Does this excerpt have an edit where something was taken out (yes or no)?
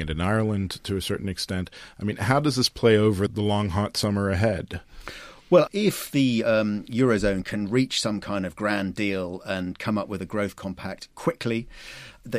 no